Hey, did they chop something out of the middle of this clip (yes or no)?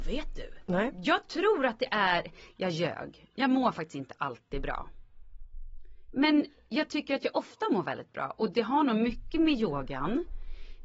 no